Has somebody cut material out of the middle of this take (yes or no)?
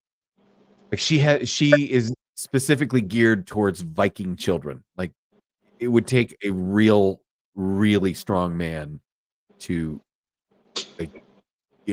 no